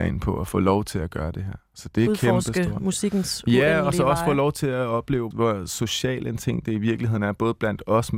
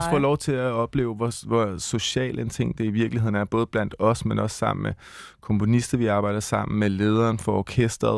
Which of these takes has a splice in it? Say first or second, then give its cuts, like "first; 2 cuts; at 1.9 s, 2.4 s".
first; 1 cut; at 5.3 s